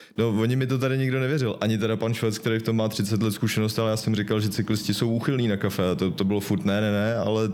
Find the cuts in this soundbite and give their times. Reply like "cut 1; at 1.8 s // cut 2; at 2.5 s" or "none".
none